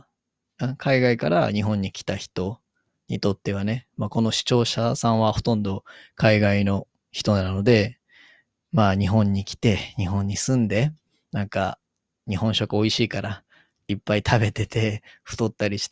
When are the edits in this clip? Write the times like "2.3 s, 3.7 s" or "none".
none